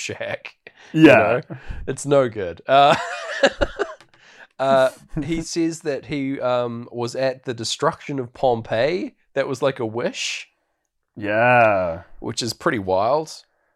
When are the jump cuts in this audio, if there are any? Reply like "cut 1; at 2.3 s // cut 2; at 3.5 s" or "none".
none